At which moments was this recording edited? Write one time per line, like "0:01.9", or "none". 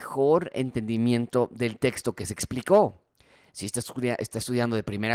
none